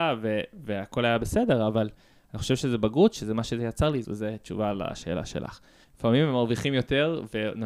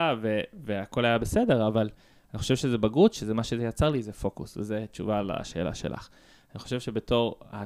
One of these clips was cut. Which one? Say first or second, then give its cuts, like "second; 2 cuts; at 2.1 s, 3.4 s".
first; 2 cuts; at 4.0 s, 5.8 s